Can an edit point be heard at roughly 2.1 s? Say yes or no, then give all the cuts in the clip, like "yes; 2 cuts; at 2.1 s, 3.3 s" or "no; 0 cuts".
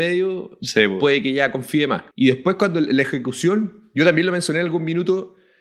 yes; 1 cut; at 2.1 s